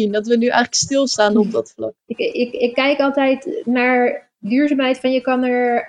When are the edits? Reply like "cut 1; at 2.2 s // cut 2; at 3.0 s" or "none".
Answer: cut 1; at 2.0 s